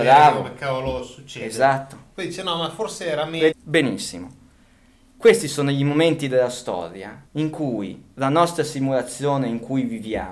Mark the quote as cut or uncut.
cut